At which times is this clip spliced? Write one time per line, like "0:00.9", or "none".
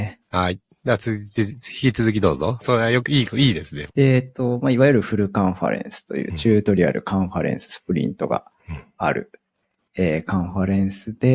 0:02.6
0:03.9